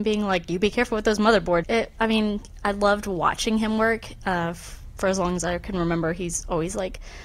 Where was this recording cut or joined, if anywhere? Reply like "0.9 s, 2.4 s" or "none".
1.6 s

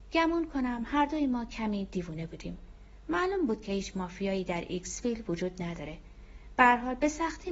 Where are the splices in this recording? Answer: none

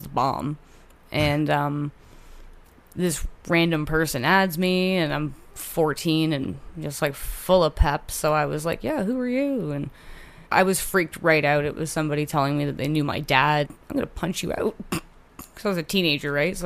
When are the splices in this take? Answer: 10.5 s, 13.6 s

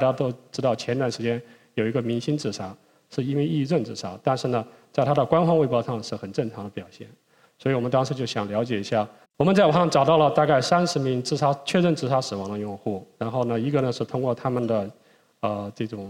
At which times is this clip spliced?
9.2 s

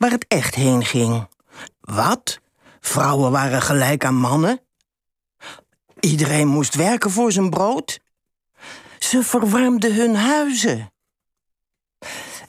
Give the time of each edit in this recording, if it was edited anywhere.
1.7 s

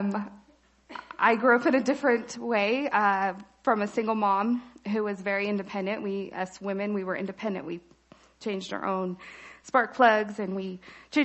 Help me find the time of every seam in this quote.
none

